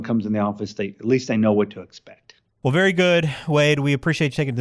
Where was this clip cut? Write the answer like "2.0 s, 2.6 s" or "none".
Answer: none